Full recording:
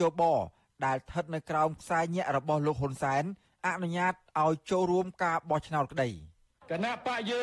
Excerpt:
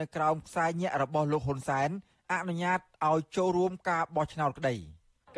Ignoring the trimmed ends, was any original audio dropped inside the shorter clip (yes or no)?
no